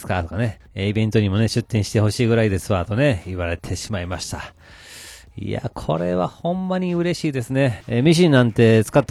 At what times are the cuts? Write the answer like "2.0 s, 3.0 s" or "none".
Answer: 7.8 s